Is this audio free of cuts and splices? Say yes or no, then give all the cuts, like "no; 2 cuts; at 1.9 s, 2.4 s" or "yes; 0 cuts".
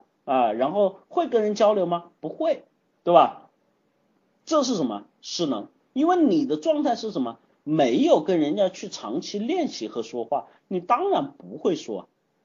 yes; 0 cuts